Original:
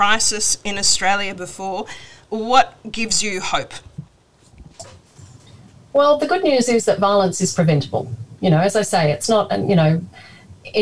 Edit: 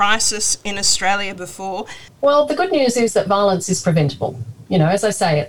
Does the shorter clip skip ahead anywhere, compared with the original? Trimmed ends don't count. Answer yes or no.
yes